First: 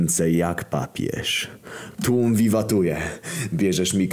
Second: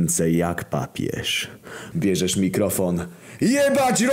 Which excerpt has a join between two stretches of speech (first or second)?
second